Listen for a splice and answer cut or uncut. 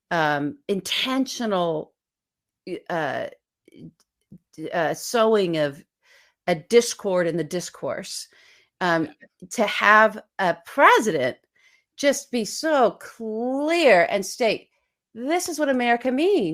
uncut